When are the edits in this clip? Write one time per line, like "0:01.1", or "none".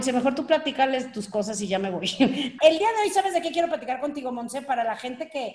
0:02.6